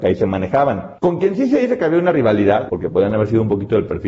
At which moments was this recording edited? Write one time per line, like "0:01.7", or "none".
0:01.0
0:02.7

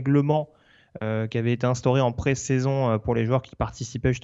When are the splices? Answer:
none

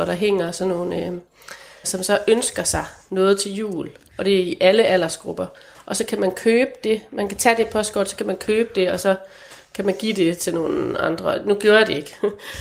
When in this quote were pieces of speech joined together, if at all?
0:01.8

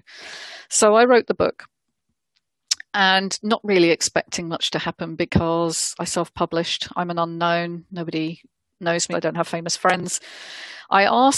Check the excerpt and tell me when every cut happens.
0:09.1

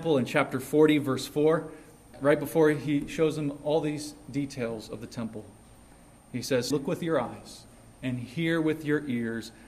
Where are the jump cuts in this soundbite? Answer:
0:02.1
0:06.7

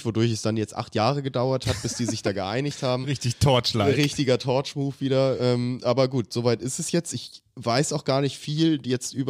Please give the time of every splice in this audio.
none

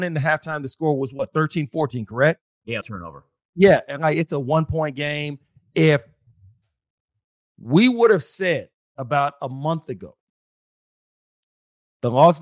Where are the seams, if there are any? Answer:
0:02.8

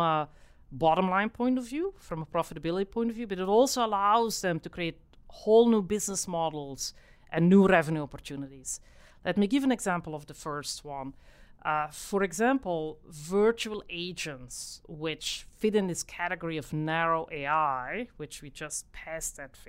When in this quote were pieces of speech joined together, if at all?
0:14.8

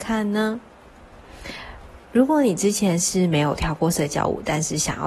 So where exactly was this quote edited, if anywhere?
none

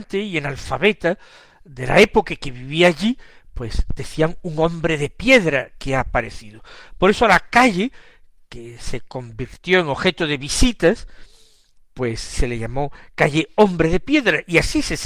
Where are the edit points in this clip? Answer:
none

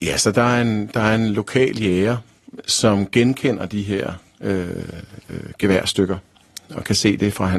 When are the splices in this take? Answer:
none

